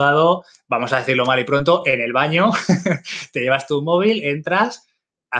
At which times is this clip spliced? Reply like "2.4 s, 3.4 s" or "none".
none